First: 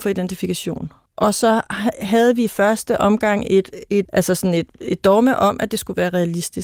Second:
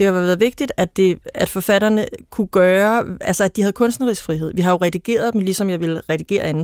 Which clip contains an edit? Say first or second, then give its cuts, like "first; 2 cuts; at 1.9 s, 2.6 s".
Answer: first; 2 cuts; at 1.1 s, 4.1 s